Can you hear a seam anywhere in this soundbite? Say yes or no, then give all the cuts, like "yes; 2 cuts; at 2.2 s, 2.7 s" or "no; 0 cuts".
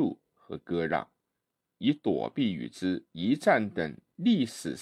yes; 1 cut; at 1.8 s